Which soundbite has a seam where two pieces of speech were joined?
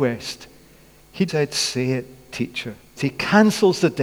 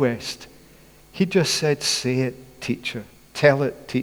first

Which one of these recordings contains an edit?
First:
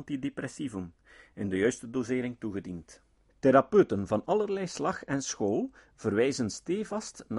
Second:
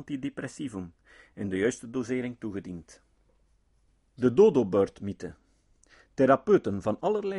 first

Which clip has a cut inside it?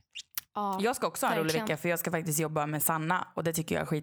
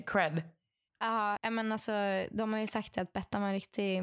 second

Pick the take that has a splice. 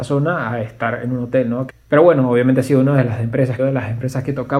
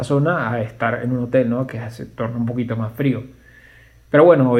first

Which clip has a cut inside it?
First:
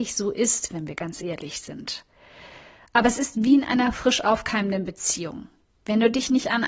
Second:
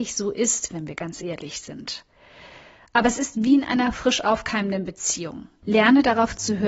second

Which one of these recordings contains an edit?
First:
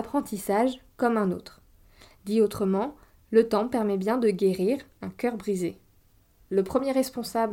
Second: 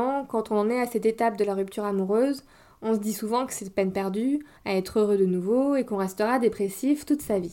second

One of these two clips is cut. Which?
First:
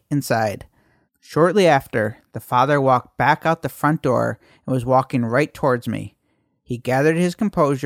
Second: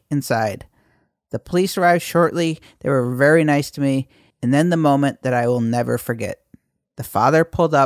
first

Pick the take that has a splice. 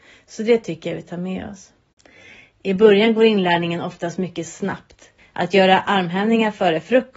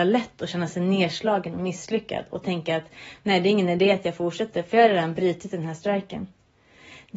first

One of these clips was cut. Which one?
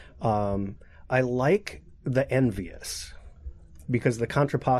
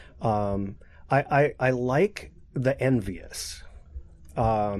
first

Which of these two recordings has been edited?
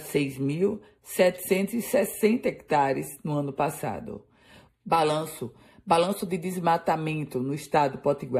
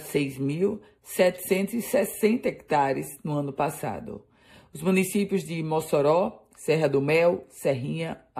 first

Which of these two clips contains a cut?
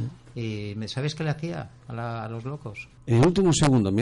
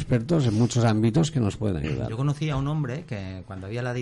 first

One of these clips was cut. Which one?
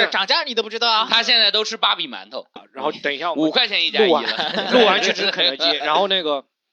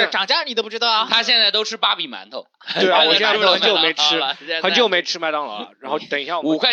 first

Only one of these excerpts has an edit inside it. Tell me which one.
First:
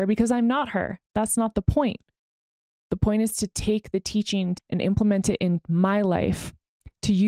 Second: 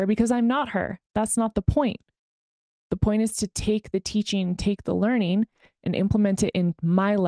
first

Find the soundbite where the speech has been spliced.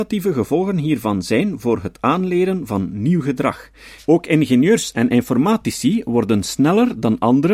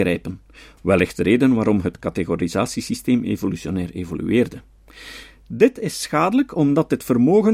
first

